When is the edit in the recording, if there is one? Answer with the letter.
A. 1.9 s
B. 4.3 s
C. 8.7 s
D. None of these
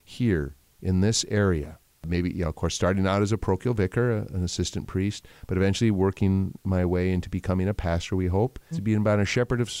C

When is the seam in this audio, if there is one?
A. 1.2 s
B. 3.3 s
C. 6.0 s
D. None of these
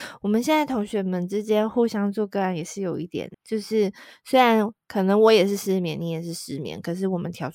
B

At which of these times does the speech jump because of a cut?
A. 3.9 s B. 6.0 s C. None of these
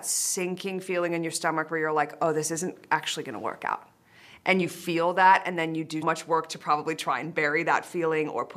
B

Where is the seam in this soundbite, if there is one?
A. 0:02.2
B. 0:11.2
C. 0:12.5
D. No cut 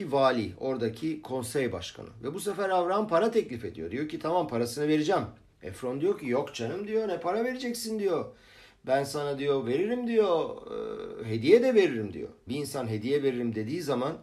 C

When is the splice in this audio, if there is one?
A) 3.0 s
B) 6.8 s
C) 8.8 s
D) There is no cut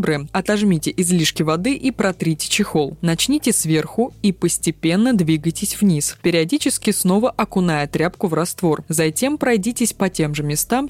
D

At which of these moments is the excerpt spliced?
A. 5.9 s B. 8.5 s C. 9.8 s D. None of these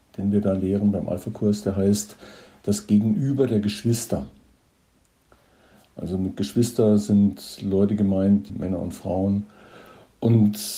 B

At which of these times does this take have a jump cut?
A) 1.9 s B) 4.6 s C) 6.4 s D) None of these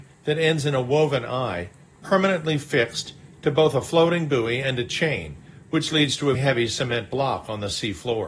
C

